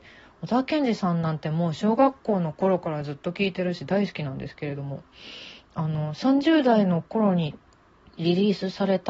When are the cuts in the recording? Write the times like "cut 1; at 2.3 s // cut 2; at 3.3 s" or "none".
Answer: none

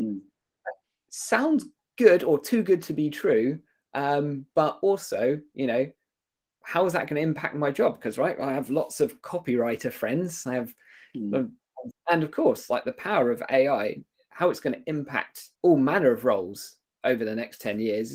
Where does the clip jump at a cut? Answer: cut 1; at 11.9 s // cut 2; at 15.6 s

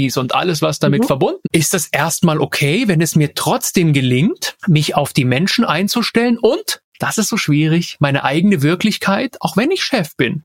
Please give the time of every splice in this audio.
cut 1; at 1.4 s

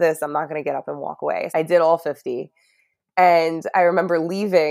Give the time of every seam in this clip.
cut 1; at 1.5 s

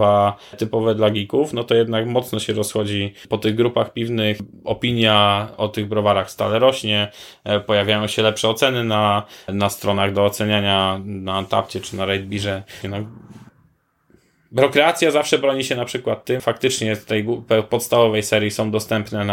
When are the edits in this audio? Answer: cut 1; at 12.8 s // cut 2; at 16.4 s

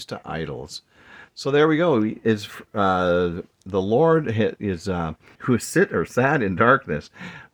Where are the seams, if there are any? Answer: cut 1; at 5.3 s

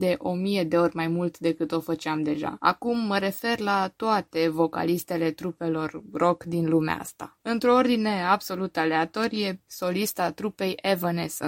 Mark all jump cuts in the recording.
cut 1; at 2.6 s // cut 2; at 9.7 s

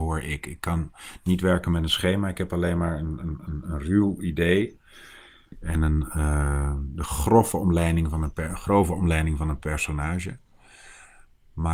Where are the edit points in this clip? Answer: none

